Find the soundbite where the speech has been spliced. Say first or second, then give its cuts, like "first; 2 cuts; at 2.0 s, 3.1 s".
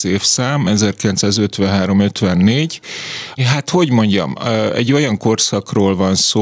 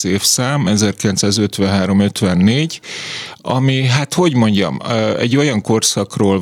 first; 1 cut; at 3.4 s